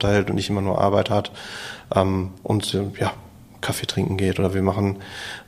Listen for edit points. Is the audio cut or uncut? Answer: uncut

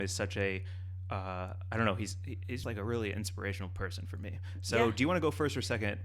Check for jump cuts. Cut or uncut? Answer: cut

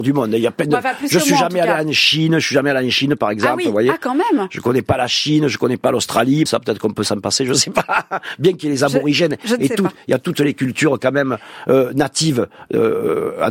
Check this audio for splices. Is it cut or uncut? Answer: cut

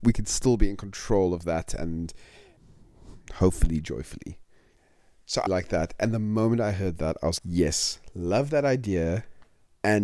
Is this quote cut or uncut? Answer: cut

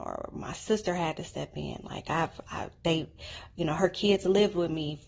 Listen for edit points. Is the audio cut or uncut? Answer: uncut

